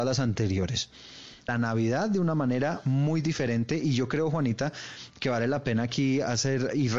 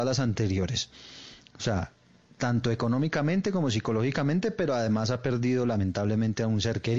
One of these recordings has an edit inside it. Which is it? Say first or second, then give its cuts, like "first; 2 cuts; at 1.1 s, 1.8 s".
first; 1 cut; at 1.5 s